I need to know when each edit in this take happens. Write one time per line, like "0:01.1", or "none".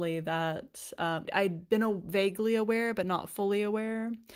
0:01.3